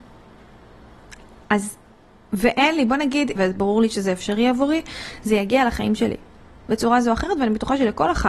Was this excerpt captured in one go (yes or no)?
no